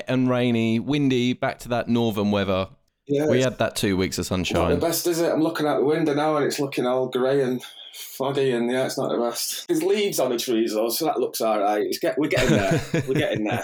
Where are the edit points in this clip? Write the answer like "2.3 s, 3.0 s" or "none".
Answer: 9.7 s